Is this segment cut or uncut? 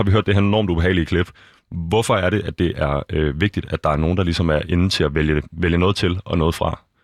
uncut